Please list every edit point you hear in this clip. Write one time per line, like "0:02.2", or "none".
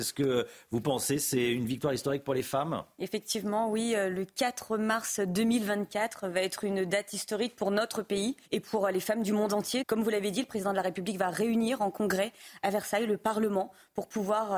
0:08.4
0:09.8